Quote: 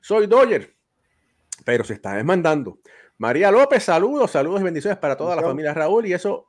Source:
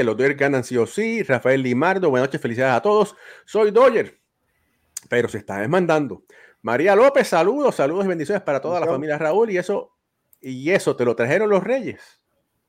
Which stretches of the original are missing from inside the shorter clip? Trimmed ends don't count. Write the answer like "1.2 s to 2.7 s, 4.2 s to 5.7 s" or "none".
none